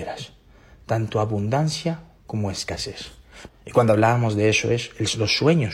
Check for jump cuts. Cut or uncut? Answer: cut